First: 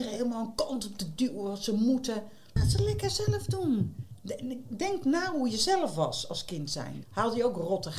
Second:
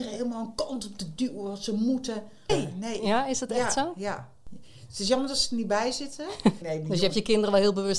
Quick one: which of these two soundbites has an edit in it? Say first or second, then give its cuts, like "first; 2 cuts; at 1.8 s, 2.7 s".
second; 2 cuts; at 2.5 s, 6.6 s